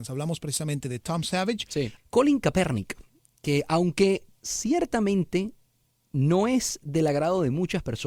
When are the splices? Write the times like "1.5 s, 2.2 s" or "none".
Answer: 2.0 s